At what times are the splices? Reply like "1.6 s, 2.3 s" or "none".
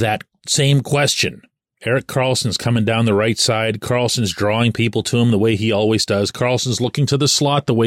1.7 s